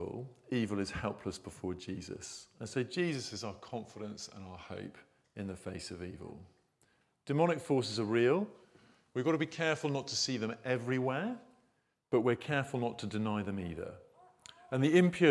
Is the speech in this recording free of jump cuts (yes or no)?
yes